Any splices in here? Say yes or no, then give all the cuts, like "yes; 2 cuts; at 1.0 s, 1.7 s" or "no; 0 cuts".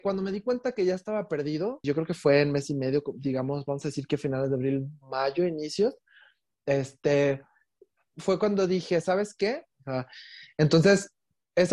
yes; 2 cuts; at 1.8 s, 9.7 s